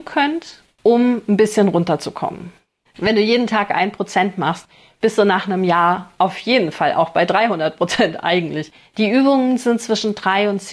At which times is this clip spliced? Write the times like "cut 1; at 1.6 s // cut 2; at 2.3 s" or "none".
cut 1; at 2.9 s // cut 2; at 8.9 s